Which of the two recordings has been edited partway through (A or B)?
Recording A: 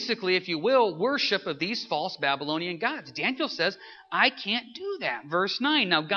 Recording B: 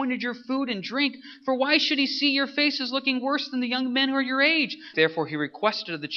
B